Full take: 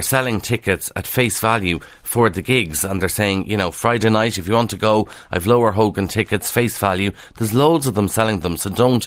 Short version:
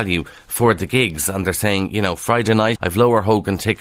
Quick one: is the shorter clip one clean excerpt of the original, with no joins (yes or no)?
no